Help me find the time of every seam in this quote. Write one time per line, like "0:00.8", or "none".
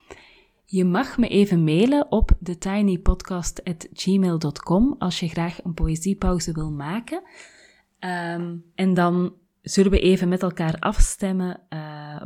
none

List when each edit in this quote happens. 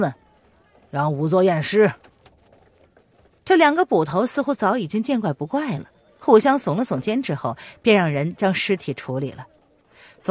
none

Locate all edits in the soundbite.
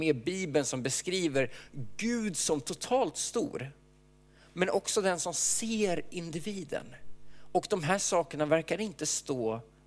none

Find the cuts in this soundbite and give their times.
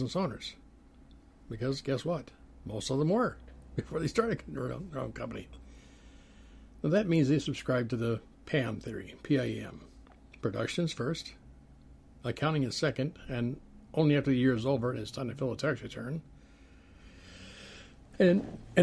none

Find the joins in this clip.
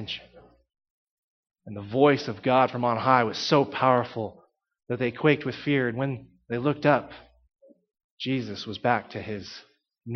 none

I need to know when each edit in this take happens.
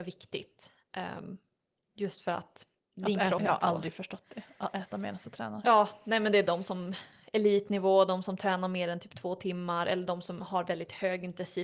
0:03.4
0:05.6

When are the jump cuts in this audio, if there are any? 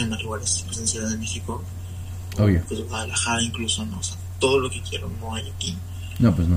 none

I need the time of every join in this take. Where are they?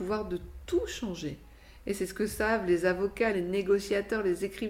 0:03.3

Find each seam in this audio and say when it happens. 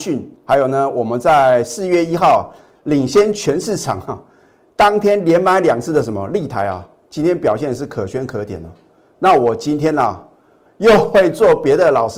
none

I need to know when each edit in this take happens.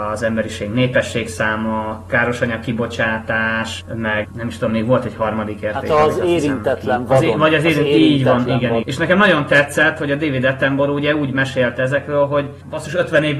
0:08.8

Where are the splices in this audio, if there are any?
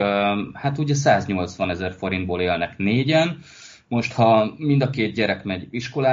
none

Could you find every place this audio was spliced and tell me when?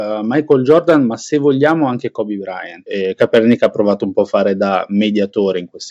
0:02.9

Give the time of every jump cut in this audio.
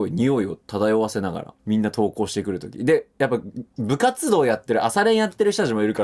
0:01.6
0:03.7

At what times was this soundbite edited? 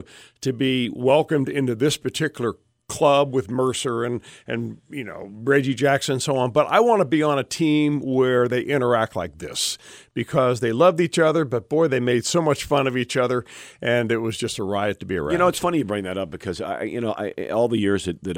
none

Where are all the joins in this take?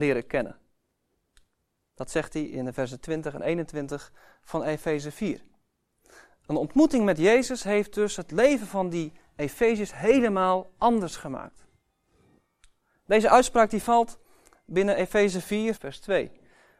0:15.8

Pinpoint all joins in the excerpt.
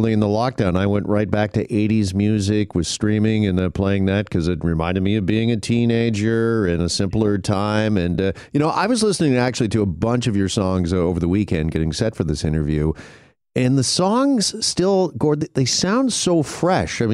none

